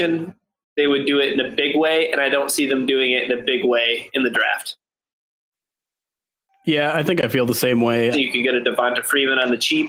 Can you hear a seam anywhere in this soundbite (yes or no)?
yes